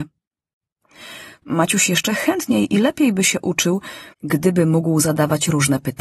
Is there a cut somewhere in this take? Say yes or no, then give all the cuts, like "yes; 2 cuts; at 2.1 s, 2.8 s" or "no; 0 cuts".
yes; 2 cuts; at 1.4 s, 4.1 s